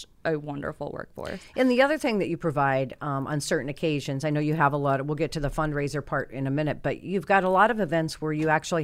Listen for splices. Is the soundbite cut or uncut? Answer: uncut